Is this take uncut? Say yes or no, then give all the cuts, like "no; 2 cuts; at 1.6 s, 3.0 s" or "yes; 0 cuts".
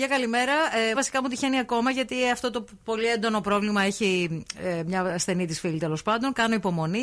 no; 1 cut; at 0.9 s